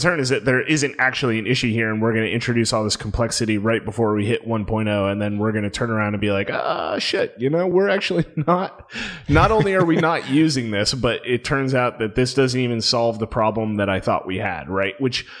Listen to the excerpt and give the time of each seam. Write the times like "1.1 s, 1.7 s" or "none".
none